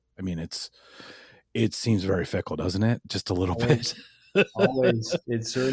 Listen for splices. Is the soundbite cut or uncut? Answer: uncut